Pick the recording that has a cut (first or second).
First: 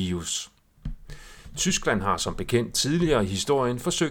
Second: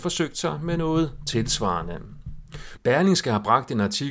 second